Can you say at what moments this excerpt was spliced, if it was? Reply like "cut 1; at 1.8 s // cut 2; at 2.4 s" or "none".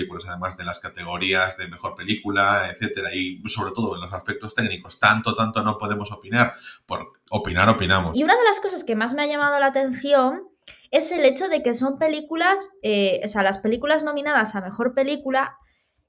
cut 1; at 8.1 s